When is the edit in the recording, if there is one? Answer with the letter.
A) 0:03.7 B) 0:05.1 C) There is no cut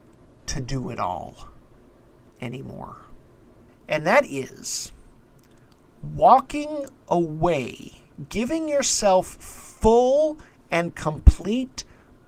A